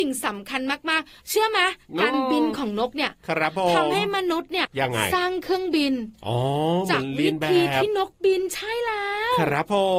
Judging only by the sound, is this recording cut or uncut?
cut